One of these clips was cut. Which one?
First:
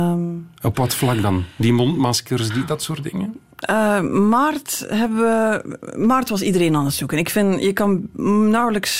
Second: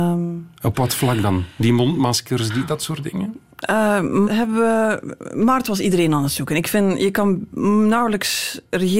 second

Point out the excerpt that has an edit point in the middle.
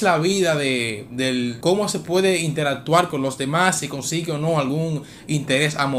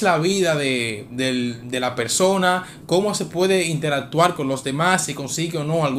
first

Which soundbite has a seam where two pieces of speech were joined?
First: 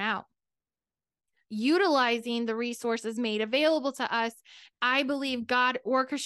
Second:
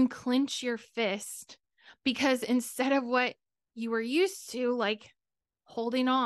first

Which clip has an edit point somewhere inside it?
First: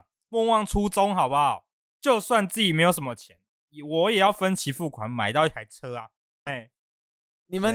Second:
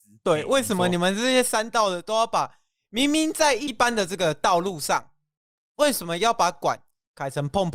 first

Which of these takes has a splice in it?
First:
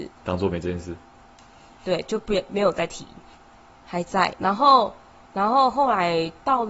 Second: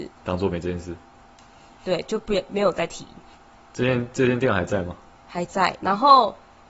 first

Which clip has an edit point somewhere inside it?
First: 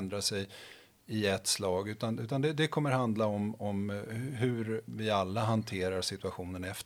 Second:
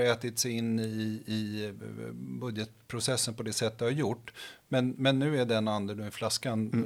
first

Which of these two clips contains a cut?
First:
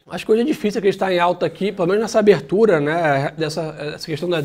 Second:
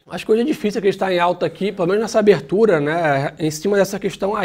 first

